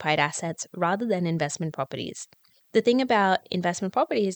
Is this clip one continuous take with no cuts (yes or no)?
yes